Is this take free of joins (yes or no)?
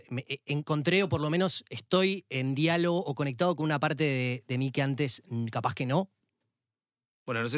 yes